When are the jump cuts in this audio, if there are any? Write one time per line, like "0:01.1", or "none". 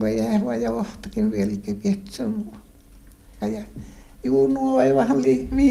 0:03.4